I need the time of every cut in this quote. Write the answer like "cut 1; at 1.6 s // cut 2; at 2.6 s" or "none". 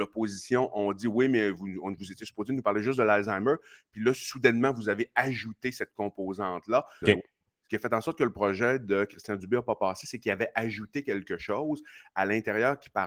cut 1; at 7.0 s